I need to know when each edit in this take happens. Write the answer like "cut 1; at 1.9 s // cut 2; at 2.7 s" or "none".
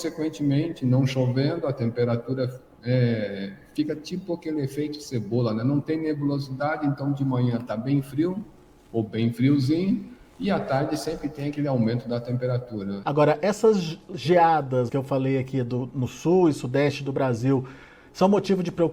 cut 1; at 13.0 s // cut 2; at 14.9 s